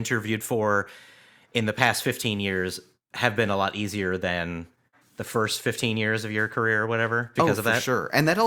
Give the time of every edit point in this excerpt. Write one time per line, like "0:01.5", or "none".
0:07.4

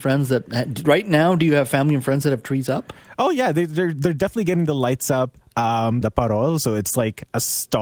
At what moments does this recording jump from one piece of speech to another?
0:06.0

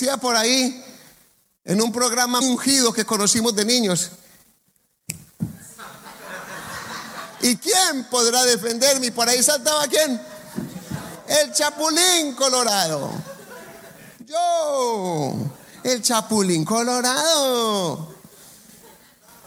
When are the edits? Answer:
0:02.4

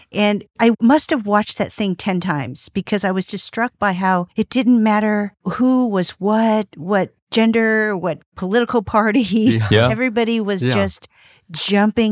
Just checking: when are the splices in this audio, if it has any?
0:04.3

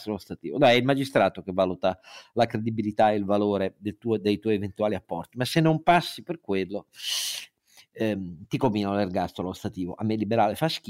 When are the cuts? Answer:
none

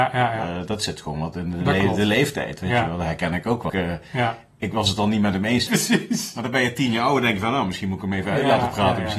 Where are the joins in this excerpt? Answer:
0:03.7
0:05.7

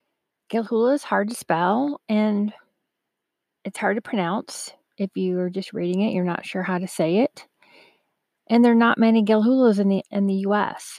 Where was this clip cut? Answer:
none

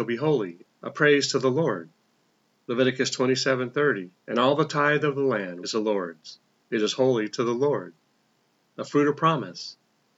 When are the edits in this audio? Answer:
0:04.2
0:05.6

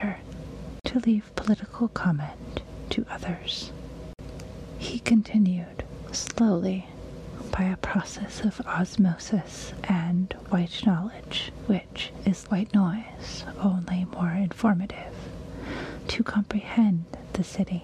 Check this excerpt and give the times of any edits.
0:12.5

